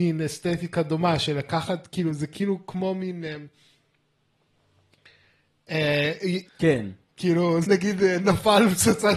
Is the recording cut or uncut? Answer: cut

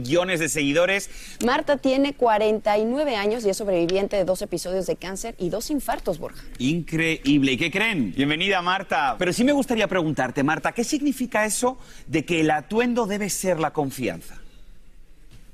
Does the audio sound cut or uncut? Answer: cut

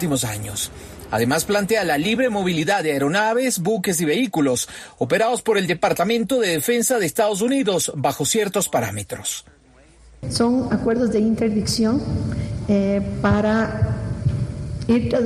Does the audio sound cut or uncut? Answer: uncut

